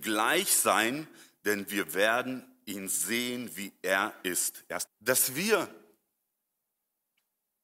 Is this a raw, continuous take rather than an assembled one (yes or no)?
no